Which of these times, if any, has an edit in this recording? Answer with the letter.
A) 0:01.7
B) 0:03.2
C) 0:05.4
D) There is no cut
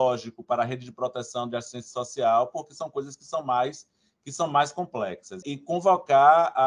C